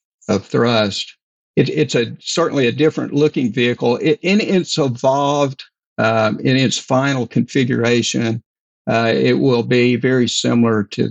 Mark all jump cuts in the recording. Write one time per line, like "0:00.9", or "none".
none